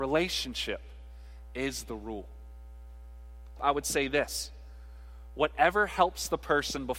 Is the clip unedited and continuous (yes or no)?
no